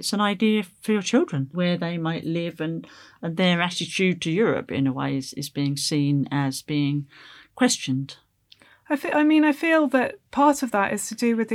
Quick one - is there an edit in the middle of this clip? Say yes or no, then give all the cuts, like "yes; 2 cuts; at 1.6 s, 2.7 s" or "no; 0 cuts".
yes; 1 cut; at 1.5 s